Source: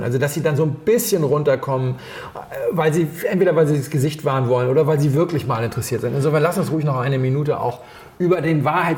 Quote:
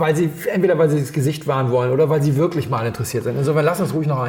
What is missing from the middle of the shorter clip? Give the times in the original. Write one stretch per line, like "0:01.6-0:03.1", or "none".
none